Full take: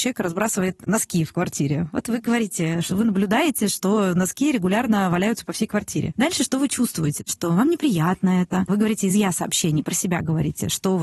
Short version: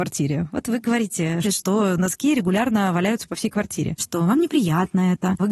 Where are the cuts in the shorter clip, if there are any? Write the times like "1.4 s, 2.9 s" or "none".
1.4 s, 4.0 s